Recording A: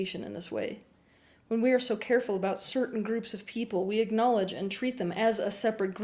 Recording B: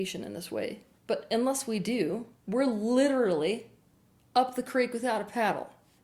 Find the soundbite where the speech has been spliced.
B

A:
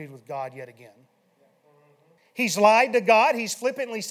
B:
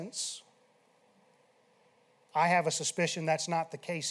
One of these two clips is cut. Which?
A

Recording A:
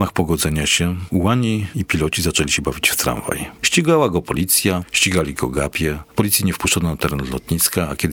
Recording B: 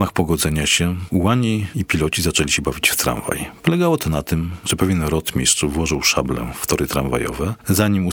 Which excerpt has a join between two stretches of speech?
A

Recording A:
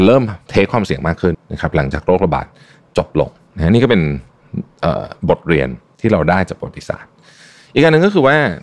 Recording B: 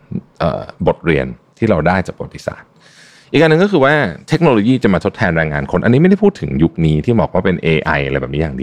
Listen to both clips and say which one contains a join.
A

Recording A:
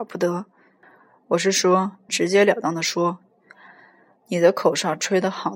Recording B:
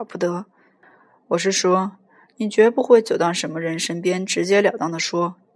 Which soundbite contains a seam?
A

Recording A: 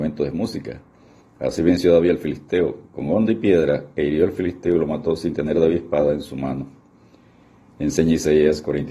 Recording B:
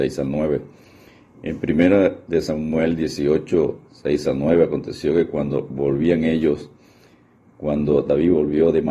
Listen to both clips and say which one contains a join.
A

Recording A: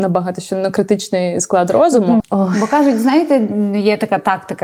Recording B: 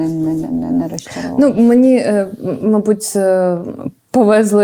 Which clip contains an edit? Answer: A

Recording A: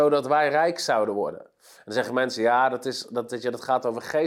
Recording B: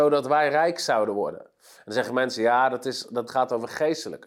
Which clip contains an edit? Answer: B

